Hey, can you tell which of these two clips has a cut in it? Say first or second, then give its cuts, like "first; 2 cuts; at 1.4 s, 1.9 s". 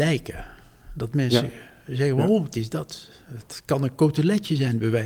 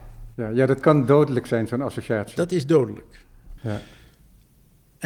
second; 1 cut; at 3.6 s